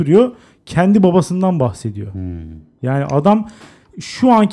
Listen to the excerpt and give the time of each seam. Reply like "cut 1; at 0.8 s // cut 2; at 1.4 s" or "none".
cut 1; at 2.8 s